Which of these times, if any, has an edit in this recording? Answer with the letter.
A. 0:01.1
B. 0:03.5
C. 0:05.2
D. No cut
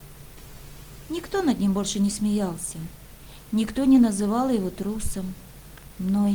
A